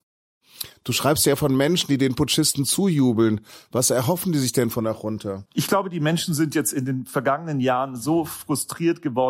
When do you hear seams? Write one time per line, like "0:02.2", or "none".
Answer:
0:05.5